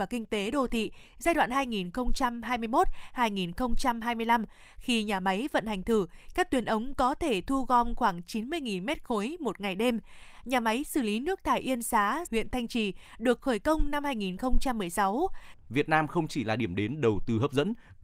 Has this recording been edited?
yes; 2 cuts; at 12.3 s, 15.5 s

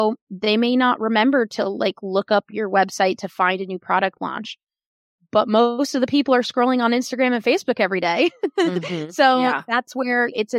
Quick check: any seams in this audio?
no; 0 cuts

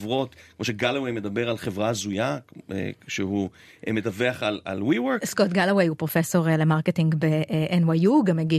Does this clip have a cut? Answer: no; 0 cuts

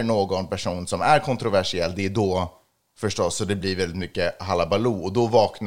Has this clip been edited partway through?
no; 0 cuts

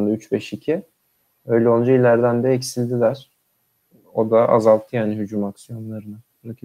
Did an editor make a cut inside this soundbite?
no; 0 cuts

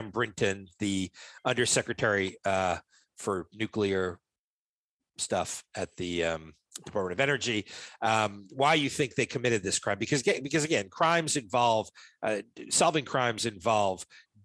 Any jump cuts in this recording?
no; 0 cuts

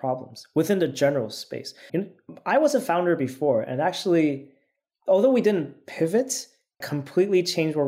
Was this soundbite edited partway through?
yes; 2 cuts; at 1.9 s, 6.8 s

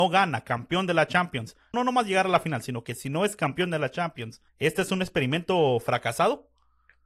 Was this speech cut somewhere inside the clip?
yes; 2 cuts; at 1.7 s, 4.5 s

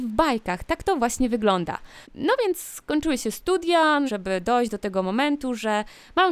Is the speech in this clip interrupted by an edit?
yes; 2 cuts; at 2.0 s, 4.1 s

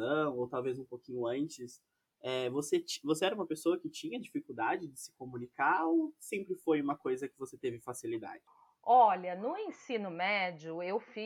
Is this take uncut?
yes; 0 cuts

